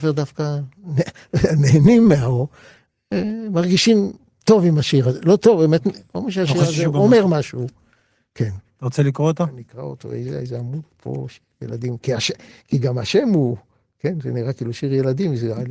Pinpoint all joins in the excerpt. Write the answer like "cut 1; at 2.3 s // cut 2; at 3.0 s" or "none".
none